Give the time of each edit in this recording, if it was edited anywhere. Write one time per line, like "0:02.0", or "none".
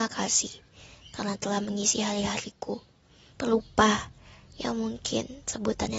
0:03.3